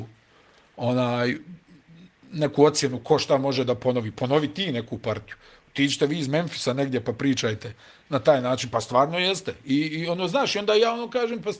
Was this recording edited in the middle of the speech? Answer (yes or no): no